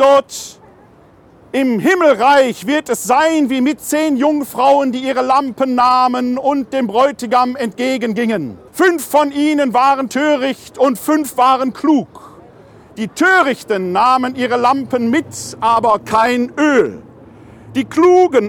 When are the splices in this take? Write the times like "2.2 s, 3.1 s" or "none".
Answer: 8.7 s